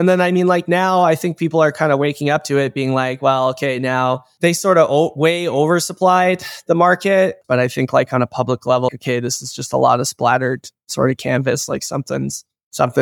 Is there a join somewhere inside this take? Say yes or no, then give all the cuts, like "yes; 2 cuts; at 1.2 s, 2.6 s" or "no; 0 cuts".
yes; 2 cuts; at 7.4 s, 8.9 s